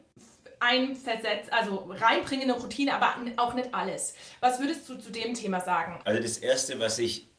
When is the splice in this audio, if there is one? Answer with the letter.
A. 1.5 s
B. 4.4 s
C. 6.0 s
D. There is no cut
C